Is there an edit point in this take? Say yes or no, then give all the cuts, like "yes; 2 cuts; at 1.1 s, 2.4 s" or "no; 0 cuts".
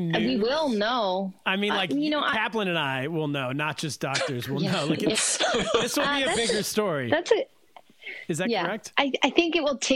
no; 0 cuts